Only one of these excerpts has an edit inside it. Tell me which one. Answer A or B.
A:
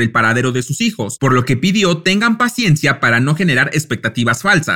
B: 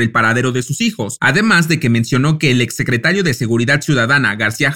B